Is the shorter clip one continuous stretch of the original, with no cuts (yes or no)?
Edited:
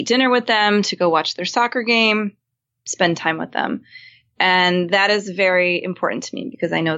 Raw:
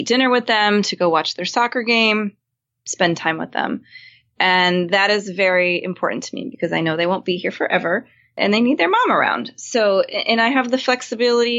yes